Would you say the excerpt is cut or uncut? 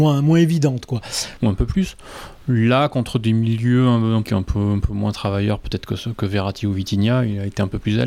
cut